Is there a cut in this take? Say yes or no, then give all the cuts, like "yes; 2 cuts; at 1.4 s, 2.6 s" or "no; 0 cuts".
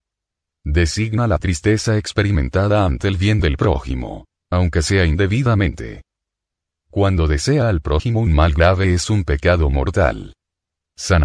yes; 1 cut; at 4.4 s